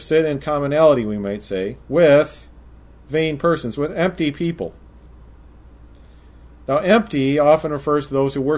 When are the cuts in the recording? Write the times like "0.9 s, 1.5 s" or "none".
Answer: 1.8 s

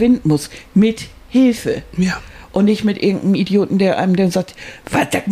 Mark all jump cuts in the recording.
none

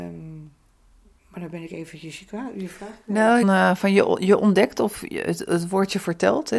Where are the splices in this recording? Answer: 3.4 s

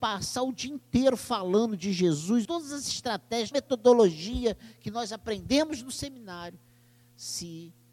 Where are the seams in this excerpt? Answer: 2.5 s, 3.5 s

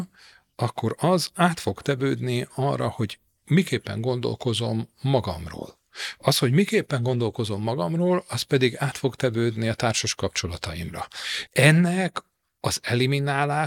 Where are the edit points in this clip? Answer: 11.5 s

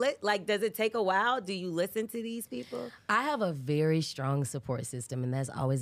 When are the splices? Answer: none

